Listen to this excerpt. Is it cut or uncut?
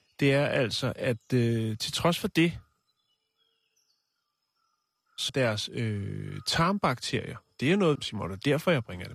cut